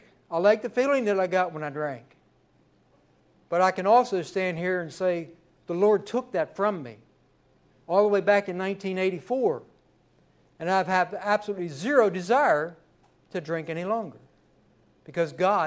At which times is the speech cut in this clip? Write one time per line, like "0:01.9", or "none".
none